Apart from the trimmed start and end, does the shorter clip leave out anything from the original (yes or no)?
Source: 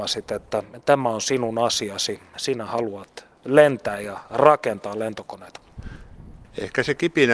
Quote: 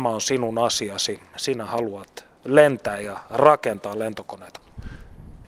no